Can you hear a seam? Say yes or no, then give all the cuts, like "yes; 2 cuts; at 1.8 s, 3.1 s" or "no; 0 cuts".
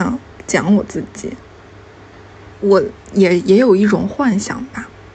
yes; 1 cut; at 2.5 s